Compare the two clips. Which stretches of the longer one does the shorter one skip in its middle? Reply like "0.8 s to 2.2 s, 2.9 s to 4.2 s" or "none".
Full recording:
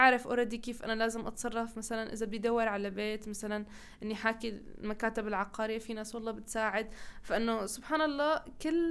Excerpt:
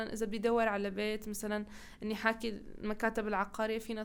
none